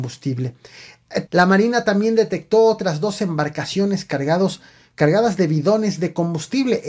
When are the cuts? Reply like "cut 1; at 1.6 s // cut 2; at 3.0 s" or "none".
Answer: cut 1; at 1.3 s